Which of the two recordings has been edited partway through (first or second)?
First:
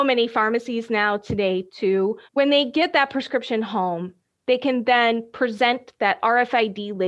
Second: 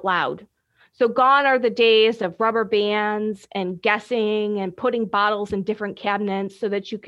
first